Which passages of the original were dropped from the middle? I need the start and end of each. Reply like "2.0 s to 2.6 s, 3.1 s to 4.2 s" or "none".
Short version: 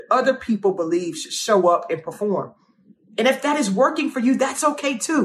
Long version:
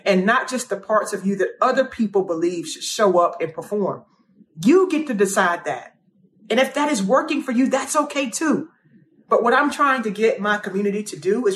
4.5 s to 6.4 s